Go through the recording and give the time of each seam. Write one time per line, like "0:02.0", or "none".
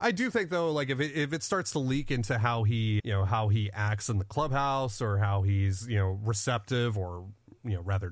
0:03.0

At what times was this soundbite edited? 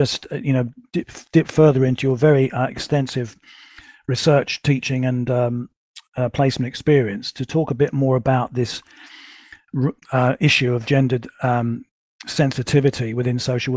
none

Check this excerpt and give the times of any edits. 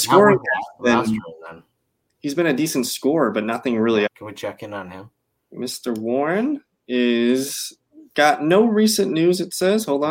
0:04.1

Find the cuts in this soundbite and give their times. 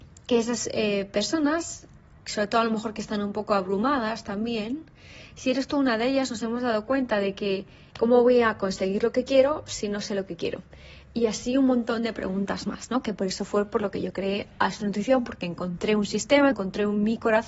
0:07.9
0:16.5

